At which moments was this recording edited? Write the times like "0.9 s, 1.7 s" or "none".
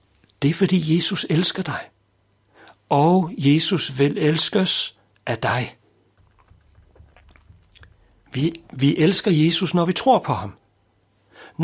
none